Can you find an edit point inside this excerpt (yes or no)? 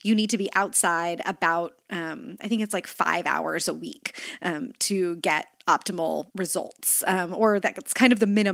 yes